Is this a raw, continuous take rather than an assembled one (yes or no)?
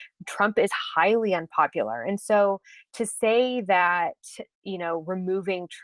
yes